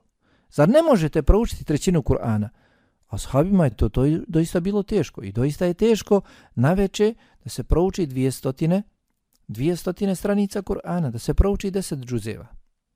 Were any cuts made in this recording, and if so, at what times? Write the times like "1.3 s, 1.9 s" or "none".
none